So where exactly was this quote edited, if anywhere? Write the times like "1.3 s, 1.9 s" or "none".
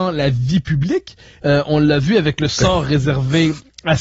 1.4 s